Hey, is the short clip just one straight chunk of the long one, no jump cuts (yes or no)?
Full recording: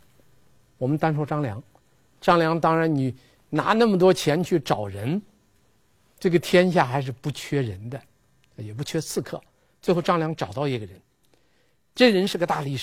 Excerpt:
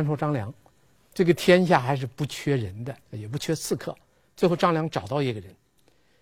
no